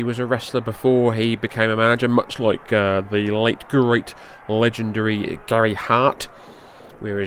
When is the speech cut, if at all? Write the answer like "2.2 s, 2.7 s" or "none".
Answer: none